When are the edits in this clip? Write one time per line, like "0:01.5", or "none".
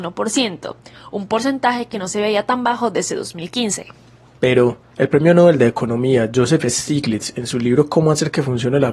0:04.9